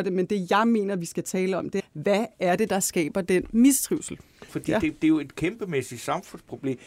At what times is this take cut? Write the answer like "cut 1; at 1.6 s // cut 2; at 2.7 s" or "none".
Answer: cut 1; at 1.8 s // cut 2; at 4.5 s